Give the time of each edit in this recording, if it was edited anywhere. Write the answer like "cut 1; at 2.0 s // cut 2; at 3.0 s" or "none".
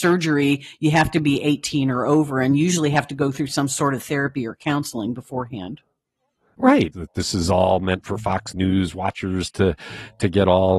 cut 1; at 6.9 s